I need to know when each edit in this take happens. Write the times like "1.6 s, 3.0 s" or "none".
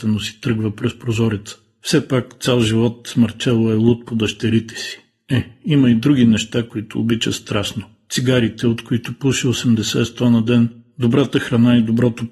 none